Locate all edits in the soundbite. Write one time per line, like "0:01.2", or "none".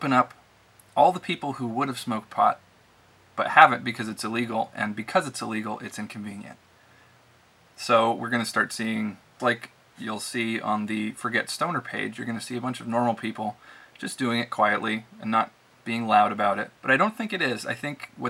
0:09.4
0:16.8